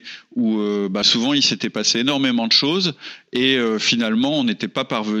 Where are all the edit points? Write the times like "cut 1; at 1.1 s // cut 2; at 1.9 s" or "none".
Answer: cut 1; at 1.0 s